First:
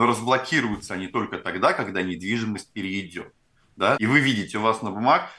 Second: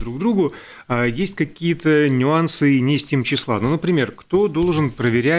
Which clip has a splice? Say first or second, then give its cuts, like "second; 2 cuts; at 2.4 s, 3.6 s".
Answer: first; 1 cut; at 4.0 s